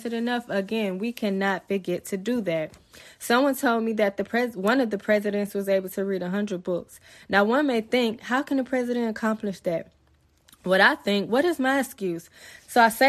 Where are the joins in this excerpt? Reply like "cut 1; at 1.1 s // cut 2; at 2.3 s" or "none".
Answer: none